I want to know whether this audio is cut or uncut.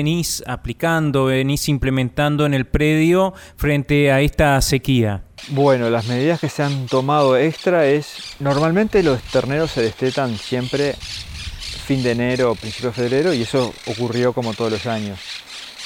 uncut